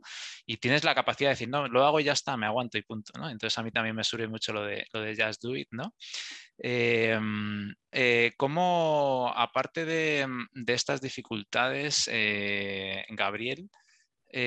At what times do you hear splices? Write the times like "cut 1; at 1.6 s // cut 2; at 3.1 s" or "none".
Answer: cut 1; at 7.9 s